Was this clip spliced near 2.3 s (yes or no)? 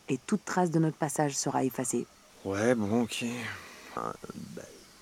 yes